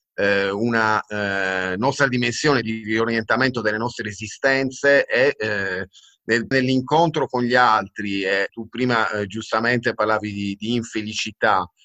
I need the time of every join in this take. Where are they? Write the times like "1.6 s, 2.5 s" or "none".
6.5 s, 8.5 s